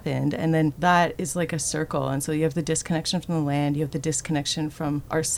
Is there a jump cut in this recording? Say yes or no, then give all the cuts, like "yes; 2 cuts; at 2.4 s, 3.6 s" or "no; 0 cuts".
no; 0 cuts